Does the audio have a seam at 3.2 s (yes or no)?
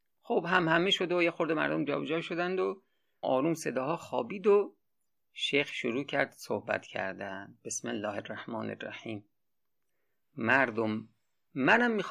yes